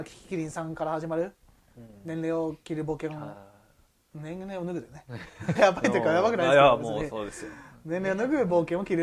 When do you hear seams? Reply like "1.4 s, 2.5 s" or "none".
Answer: 5.6 s